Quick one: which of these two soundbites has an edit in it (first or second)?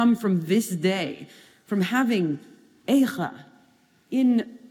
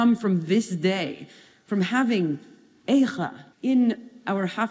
second